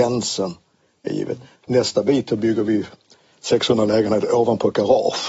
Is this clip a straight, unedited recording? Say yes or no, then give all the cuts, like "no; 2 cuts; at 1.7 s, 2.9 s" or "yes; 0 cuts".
yes; 0 cuts